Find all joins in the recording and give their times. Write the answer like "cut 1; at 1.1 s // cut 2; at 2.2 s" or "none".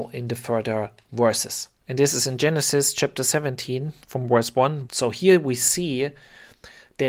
cut 1; at 1.8 s // cut 2; at 4.9 s